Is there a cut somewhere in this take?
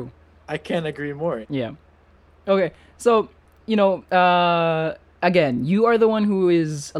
yes; 1 cut; at 1.4 s

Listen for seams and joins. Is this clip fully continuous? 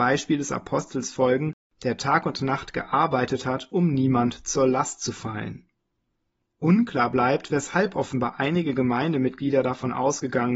yes; 0 cuts

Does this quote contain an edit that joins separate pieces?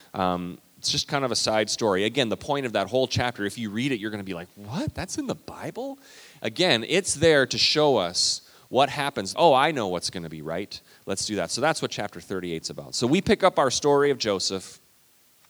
yes; 1 cut; at 9.3 s

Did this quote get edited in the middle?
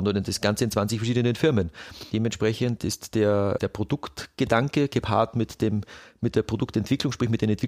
no; 0 cuts

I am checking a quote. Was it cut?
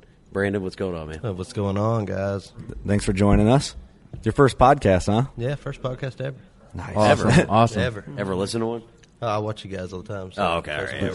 no; 0 cuts

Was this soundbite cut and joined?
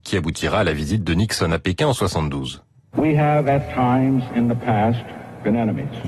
no; 0 cuts

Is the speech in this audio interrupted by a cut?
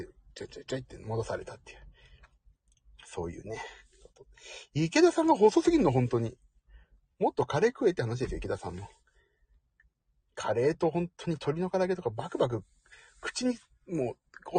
no; 0 cuts

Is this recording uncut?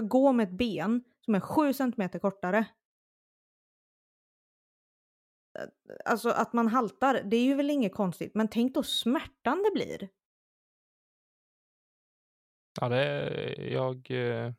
yes; 0 cuts

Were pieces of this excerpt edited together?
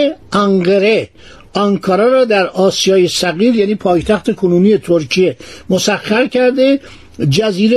no; 0 cuts

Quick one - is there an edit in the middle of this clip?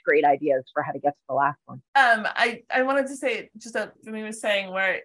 yes; 2 cuts; at 1.9 s, 3.9 s

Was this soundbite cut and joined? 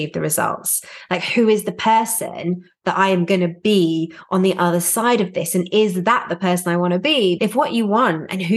yes; 1 cut; at 7.4 s

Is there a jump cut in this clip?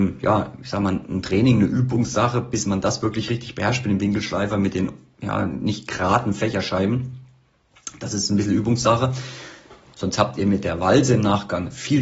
yes; 1 cut; at 9.9 s

